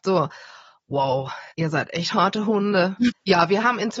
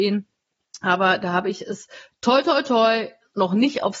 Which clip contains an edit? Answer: first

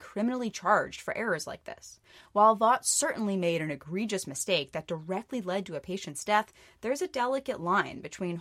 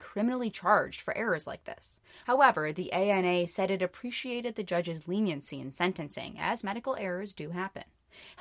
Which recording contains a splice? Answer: second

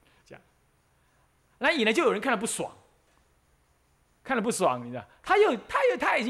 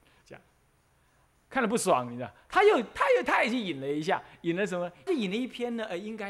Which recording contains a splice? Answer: second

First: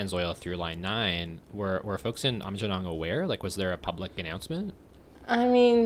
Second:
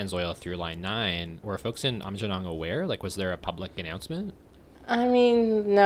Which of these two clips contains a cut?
second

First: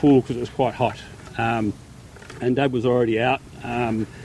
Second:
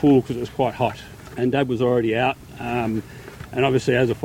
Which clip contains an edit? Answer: second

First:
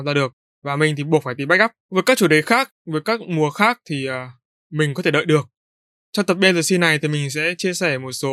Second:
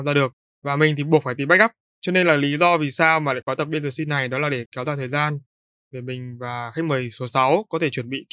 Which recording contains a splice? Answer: first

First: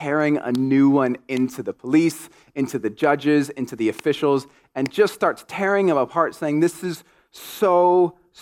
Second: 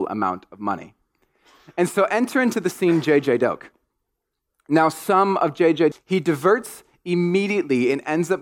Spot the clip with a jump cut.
second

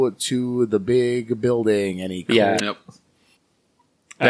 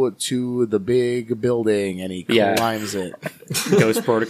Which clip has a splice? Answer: first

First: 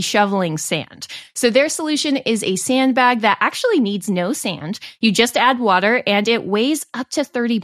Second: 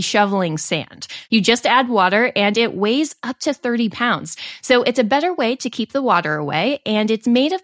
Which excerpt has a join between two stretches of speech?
second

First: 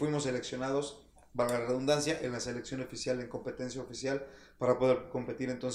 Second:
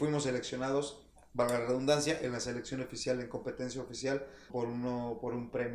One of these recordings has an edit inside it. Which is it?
second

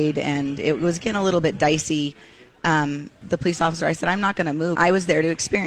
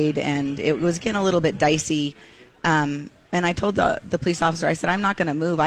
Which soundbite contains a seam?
first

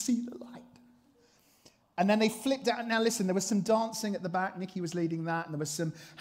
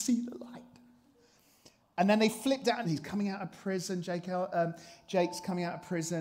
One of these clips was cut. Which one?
second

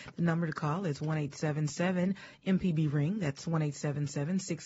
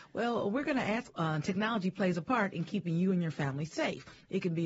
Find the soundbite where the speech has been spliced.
second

